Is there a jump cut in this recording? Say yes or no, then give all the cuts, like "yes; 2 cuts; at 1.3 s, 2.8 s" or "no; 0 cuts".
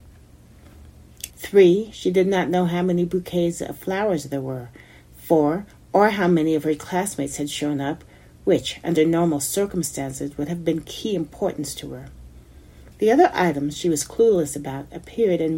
yes; 2 cuts; at 1.3 s, 12.9 s